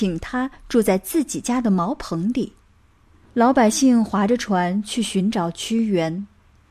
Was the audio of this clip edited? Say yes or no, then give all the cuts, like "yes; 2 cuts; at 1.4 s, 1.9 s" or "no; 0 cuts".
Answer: yes; 1 cut; at 3.2 s